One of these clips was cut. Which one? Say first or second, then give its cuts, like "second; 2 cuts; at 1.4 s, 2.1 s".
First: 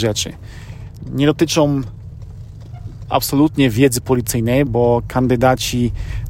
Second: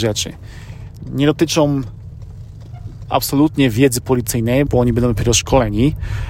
second; 1 cut; at 4.7 s